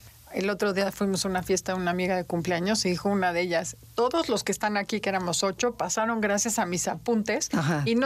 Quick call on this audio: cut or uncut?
uncut